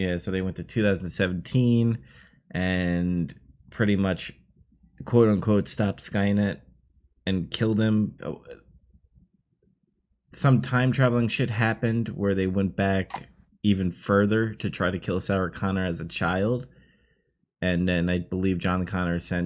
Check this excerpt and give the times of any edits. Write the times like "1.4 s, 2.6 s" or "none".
8.2 s